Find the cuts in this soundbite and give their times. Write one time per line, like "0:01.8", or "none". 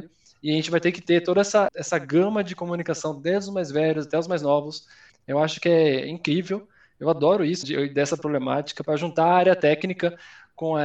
0:01.7
0:07.6